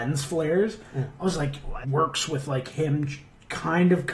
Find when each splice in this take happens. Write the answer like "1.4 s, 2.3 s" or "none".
1.8 s